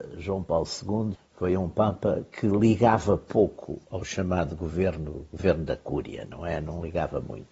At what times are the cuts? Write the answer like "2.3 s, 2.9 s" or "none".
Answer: 1.1 s

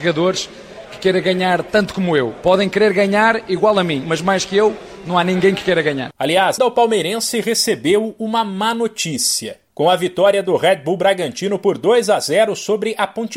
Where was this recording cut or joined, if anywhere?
6.6 s, 9.7 s

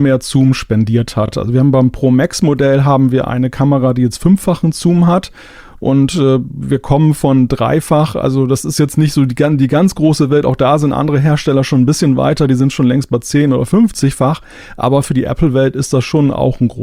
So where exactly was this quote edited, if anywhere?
none

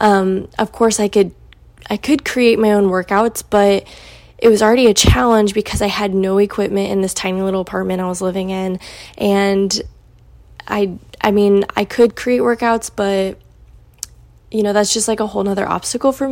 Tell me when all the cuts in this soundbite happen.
none

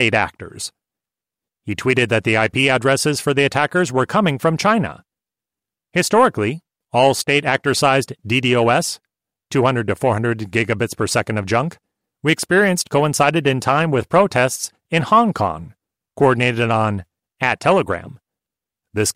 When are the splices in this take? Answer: none

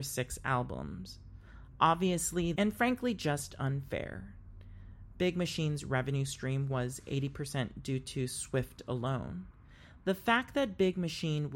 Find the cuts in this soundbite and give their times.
2.6 s

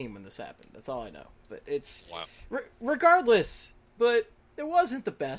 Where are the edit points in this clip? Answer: 4.0 s

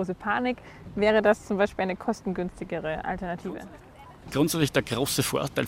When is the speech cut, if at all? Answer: none

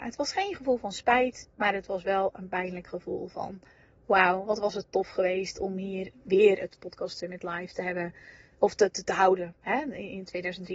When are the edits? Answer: none

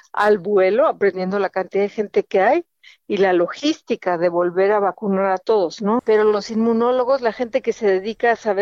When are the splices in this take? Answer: 6.0 s

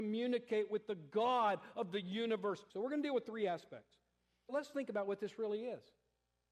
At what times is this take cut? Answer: 2.7 s, 4.5 s

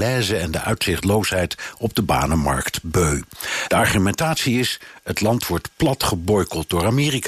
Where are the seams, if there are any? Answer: 3.7 s

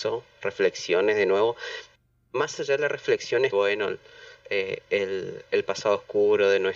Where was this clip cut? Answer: 3.5 s

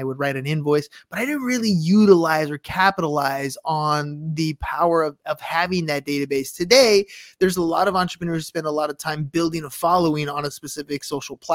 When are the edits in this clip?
none

